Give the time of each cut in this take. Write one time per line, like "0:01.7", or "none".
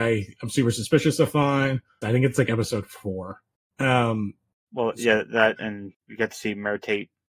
0:02.0